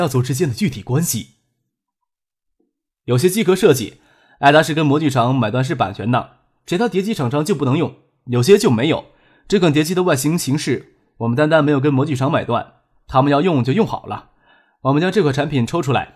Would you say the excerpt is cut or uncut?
uncut